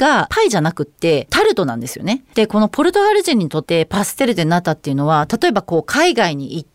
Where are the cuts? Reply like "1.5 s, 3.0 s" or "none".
2.3 s, 3.6 s